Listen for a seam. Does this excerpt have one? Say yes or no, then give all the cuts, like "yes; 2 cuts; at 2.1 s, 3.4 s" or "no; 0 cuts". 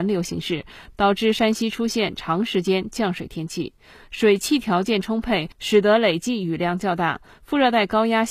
no; 0 cuts